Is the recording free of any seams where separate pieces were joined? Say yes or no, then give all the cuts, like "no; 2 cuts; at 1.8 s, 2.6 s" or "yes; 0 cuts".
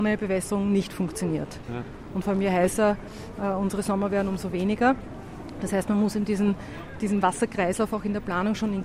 yes; 0 cuts